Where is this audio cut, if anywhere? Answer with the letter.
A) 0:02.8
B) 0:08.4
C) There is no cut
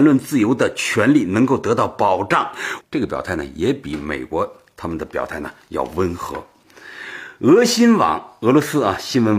A